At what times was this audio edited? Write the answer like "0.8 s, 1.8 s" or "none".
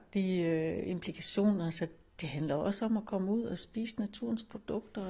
none